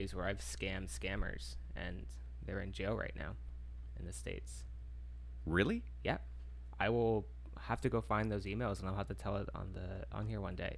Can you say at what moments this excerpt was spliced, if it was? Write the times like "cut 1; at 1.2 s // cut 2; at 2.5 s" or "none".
none

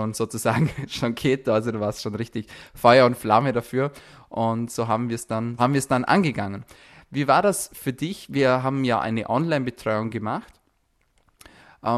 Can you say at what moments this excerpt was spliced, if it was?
cut 1; at 5.6 s

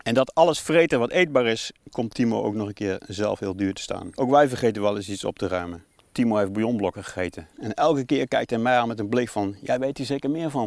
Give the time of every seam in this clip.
cut 1; at 4.1 s // cut 2; at 6.0 s // cut 3; at 7.5 s

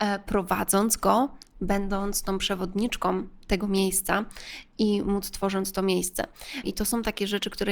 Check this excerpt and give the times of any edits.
cut 1; at 6.6 s

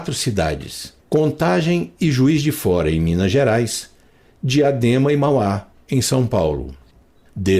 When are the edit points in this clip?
cut 1; at 1.0 s

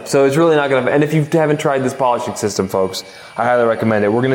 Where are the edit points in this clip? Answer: none

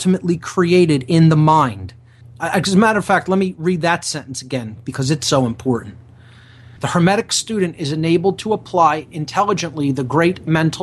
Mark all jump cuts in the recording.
cut 1; at 2.2 s // cut 2; at 6.8 s

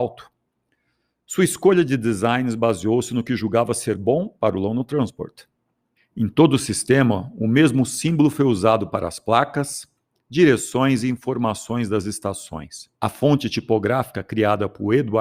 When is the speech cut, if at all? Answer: cut 1; at 6.0 s // cut 2; at 12.9 s

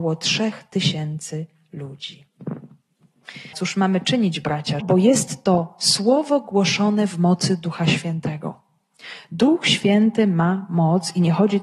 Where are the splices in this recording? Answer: cut 1; at 3.5 s // cut 2; at 4.8 s

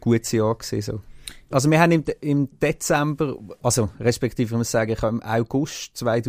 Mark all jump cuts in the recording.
cut 1; at 1.5 s

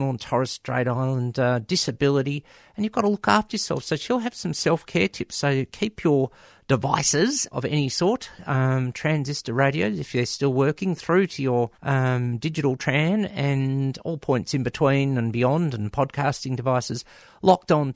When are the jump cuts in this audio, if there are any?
cut 1; at 7.5 s // cut 2; at 11.7 s

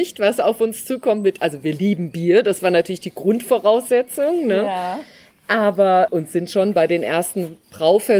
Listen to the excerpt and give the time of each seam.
none

